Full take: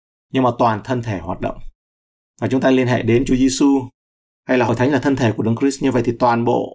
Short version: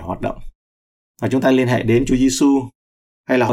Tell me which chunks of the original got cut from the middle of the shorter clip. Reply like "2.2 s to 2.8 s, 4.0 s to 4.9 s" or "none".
none